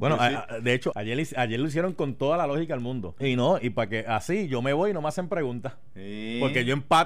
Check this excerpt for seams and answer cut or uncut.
cut